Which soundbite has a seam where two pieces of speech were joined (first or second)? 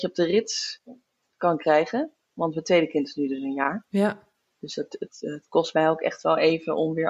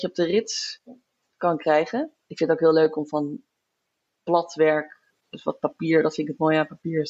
second